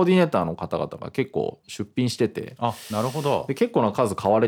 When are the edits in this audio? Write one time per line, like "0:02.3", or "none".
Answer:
none

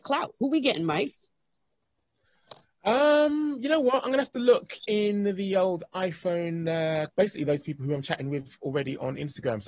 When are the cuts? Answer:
0:07.1

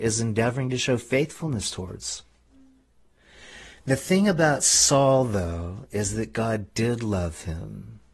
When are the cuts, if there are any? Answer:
none

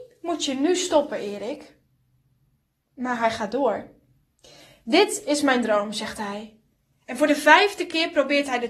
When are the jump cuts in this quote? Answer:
none

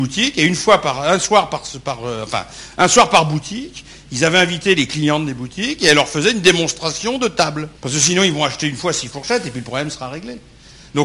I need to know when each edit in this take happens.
0:07.7

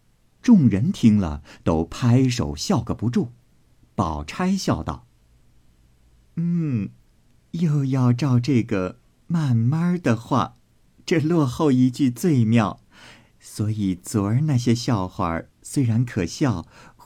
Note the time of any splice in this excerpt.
none

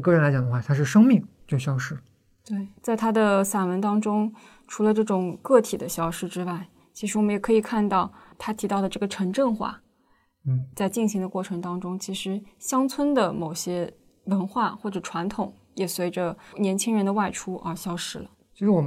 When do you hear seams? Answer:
none

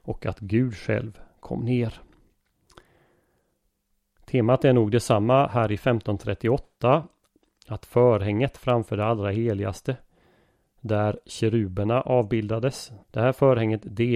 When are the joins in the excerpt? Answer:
0:13.0

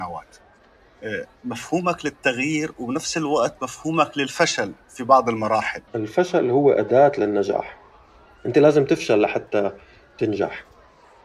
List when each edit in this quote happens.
0:05.9

